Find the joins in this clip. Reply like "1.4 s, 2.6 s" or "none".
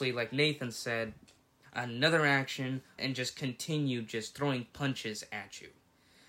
1.6 s, 3.0 s